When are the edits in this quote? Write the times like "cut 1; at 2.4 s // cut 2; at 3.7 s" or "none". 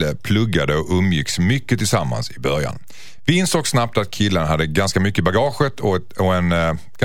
none